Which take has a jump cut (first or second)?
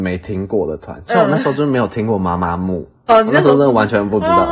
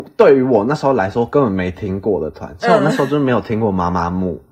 first